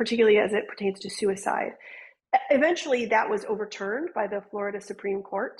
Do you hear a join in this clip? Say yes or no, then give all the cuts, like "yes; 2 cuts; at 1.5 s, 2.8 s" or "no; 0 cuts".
no; 0 cuts